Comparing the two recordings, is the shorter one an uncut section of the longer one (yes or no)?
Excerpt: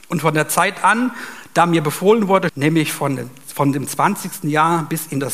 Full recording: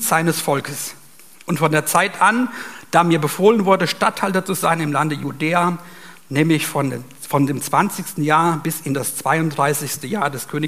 no